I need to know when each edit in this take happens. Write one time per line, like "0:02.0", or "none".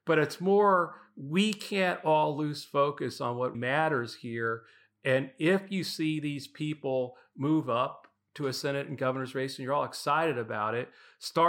0:03.5